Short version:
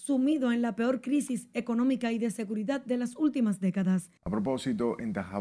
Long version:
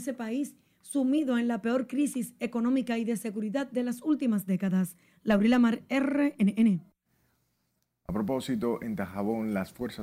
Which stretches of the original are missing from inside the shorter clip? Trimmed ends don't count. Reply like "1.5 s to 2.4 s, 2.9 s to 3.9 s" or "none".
5.0 s to 8.0 s